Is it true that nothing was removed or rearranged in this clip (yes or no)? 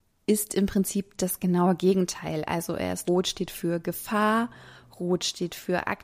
no